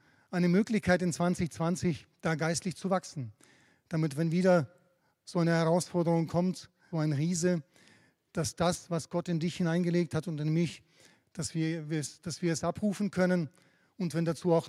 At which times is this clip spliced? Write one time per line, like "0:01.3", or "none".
0:06.9